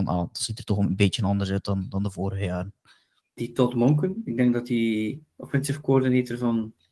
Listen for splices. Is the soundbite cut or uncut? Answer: cut